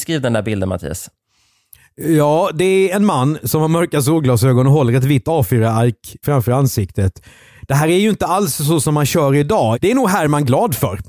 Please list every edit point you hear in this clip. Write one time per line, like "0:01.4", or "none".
0:06.2
0:09.7